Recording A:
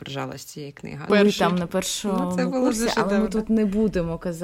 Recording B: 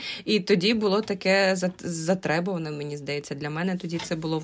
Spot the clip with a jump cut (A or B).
A